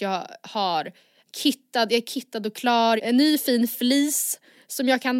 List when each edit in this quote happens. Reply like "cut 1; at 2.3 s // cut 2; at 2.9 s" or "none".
cut 1; at 1.3 s // cut 2; at 3.0 s